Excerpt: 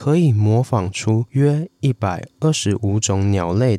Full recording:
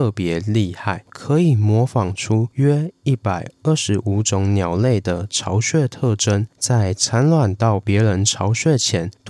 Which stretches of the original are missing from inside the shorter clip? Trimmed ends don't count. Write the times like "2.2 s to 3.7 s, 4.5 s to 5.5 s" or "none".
none